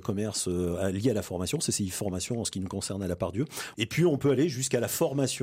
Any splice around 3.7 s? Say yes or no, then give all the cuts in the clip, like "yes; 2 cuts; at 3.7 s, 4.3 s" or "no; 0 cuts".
yes; 1 cut; at 3.7 s